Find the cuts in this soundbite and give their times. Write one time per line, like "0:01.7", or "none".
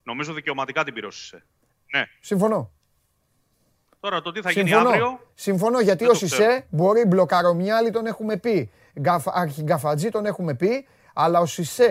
0:01.7